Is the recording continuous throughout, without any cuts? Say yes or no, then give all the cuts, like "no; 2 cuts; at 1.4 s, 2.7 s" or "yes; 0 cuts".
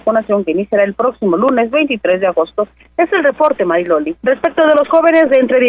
no; 1 cut; at 4.1 s